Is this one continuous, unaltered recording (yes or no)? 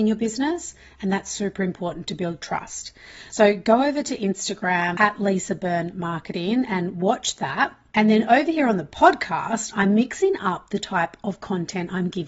yes